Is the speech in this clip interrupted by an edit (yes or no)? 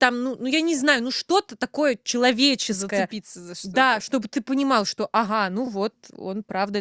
no